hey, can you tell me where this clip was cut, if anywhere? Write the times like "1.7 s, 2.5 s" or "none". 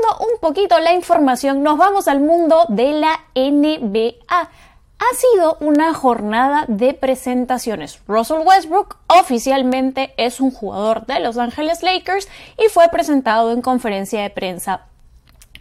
none